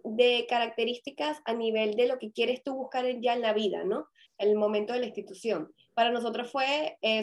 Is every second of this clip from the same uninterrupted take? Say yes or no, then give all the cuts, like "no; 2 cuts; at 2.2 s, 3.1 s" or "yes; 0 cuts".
no; 1 cut; at 4.3 s